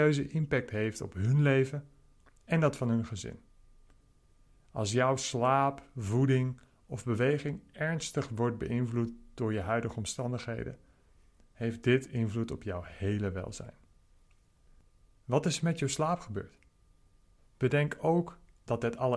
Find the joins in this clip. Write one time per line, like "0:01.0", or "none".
0:17.4